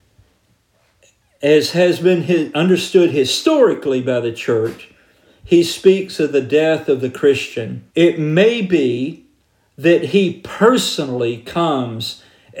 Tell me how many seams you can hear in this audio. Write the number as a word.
one